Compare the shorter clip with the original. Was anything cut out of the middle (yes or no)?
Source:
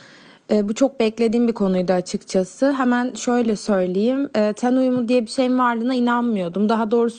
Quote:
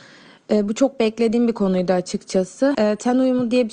yes